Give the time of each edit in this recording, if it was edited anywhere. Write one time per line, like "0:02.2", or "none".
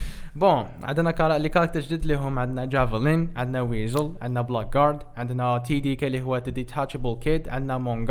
none

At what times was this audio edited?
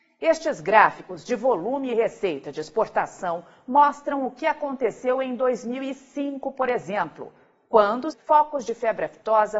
0:08.1

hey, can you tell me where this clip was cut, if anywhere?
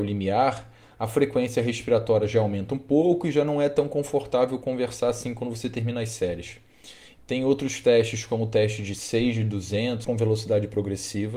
0:07.2
0:10.0

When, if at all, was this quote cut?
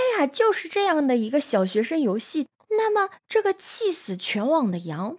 0:02.6

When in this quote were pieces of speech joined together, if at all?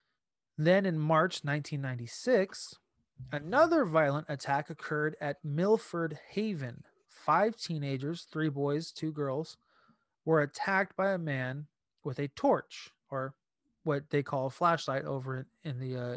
none

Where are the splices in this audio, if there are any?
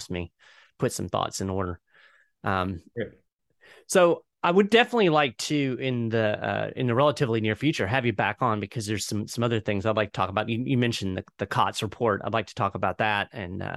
none

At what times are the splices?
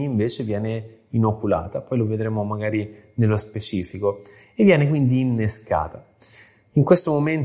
none

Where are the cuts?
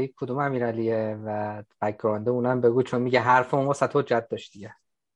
none

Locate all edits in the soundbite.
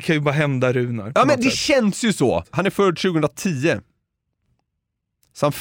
0:02.4

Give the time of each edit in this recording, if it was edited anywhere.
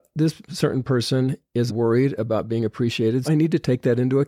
0:01.7
0:03.2

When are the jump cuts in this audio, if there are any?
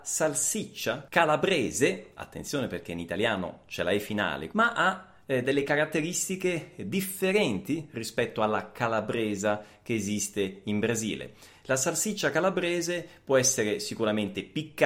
0:04.5

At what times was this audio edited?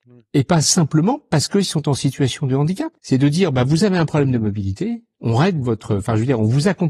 0:03.0

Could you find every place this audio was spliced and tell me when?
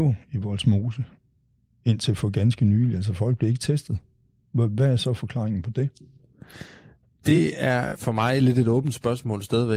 none

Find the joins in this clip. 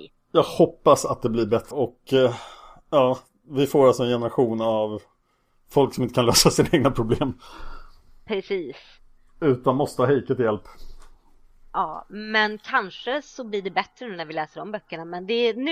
0:01.7

